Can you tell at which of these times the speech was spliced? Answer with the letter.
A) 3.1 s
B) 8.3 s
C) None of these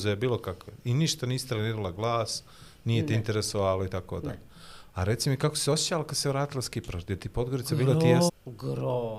B